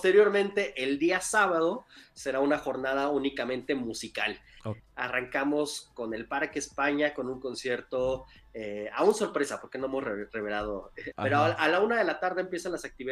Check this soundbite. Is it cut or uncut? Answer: cut